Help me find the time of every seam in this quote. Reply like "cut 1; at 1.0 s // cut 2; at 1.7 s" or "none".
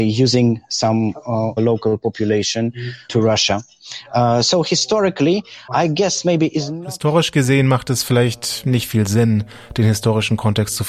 cut 1; at 1.6 s